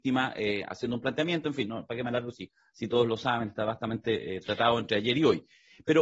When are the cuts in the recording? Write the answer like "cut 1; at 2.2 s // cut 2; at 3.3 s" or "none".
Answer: none